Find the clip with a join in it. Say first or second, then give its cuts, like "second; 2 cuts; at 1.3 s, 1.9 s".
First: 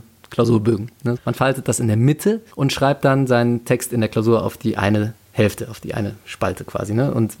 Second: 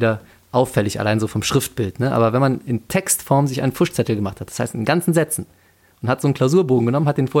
first; 2 cuts; at 1.2 s, 2.5 s